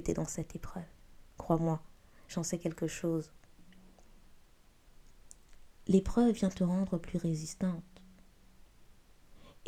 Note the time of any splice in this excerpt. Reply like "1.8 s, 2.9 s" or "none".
none